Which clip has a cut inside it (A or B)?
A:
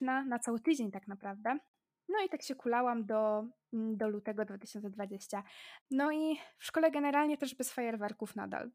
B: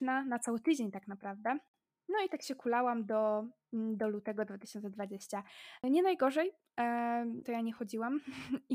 B